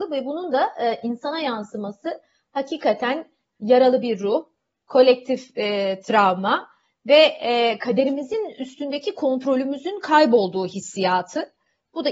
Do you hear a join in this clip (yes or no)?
no